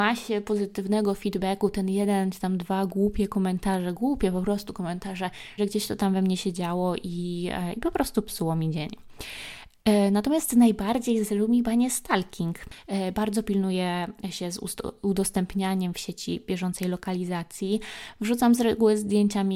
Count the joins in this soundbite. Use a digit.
1